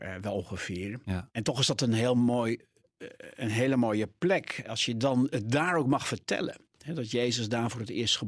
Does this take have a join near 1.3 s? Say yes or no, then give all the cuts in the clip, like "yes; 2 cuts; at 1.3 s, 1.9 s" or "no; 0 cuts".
yes; 1 cut; at 1.3 s